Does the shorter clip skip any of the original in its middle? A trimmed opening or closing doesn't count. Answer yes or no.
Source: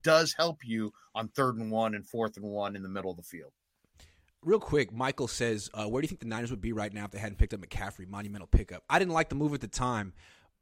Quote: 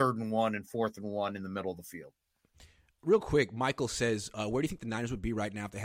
no